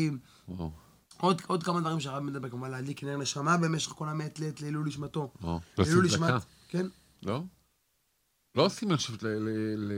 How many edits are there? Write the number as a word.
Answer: zero